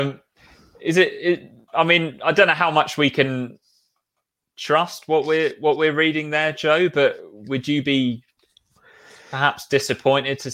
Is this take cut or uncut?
uncut